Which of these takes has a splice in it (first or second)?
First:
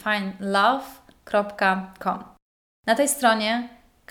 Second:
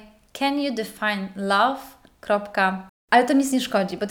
second